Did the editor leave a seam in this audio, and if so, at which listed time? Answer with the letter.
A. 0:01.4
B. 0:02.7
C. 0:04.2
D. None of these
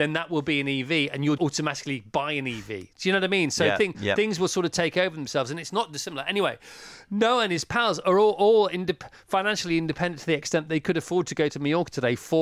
A